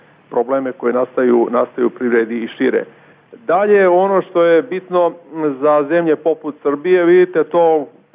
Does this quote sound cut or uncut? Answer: uncut